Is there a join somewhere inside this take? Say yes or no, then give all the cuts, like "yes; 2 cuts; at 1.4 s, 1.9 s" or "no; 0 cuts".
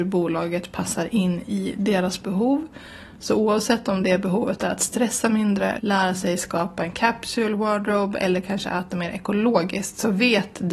yes; 1 cut; at 5.8 s